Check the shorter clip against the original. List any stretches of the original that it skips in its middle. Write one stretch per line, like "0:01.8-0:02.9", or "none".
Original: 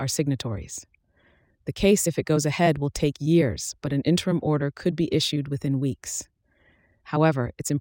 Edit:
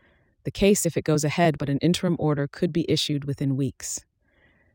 0:02.8-0:03.8